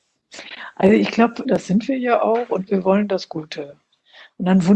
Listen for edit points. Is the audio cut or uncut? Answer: cut